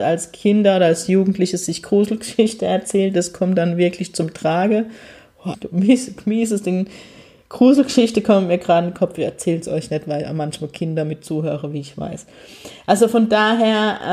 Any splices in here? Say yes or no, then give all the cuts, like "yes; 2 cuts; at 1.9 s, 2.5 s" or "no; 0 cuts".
yes; 1 cut; at 5.5 s